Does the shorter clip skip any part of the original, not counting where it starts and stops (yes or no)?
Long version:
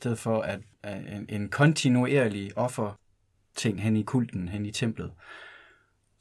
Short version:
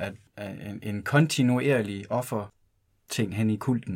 no